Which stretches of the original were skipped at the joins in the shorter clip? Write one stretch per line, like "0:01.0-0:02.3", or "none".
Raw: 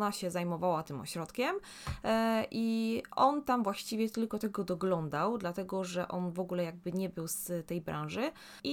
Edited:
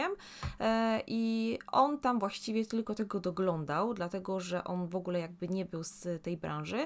none

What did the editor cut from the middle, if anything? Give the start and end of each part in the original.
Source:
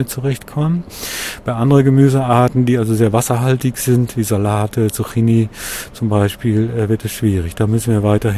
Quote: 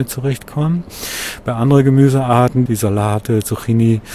0:02.7-0:04.1

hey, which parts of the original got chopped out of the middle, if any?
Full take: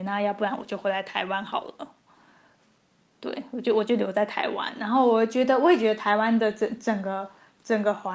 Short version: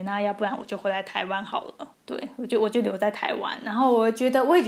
0:01.9-0:03.1

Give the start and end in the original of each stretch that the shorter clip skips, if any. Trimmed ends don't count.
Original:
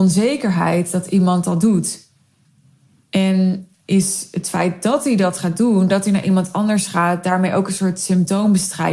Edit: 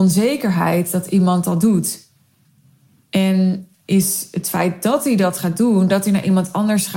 none

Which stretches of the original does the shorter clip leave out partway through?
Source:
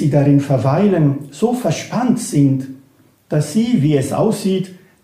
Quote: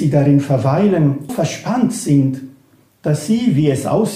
0:01.3-0:01.6

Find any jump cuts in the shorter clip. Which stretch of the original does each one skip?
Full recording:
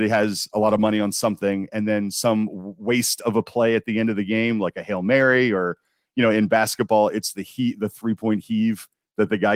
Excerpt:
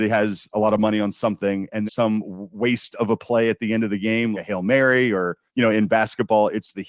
0:01.9-0:02.1
0:04.6-0:04.7
0:05.9-0:06.1

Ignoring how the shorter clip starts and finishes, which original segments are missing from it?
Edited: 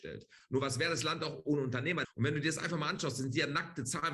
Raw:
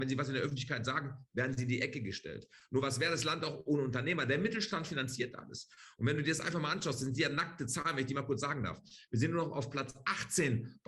0:04.3-0:05.9

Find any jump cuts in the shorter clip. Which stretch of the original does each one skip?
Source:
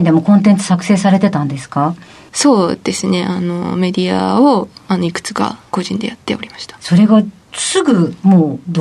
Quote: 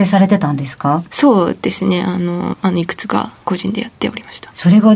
0:02.0-0:02.3
0:03.7-0:04.8

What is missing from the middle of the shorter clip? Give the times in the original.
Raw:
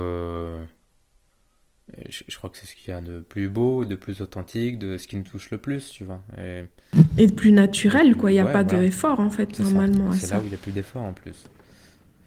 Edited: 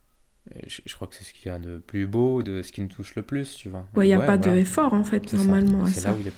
0:03.9-0:04.8
0:06.3-0:08.2

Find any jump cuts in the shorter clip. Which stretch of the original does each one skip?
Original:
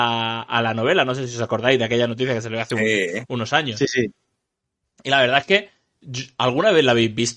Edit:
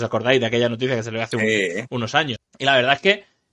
0:03.7-0:04.8

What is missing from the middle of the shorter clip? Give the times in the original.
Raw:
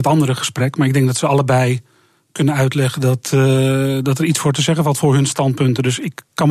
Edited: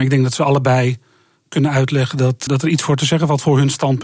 0:03.3-0:04.0

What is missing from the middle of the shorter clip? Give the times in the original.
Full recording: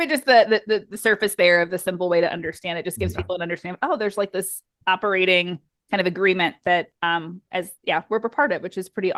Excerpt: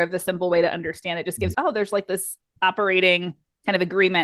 0:03.1-0:03.8

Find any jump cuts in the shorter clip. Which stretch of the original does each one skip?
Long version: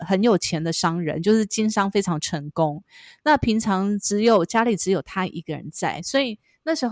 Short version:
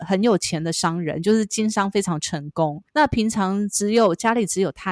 0:02.9-0:03.2

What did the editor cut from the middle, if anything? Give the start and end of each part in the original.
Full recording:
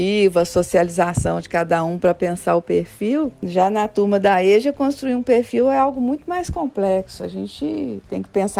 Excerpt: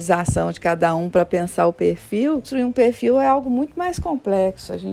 0:03.3-0:05.0

